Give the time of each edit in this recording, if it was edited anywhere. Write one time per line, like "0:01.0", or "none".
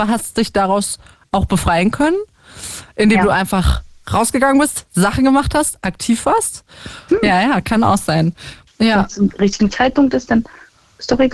0:07.1
0:08.7